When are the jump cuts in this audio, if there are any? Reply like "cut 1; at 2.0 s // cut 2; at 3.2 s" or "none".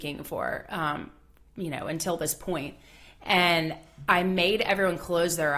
none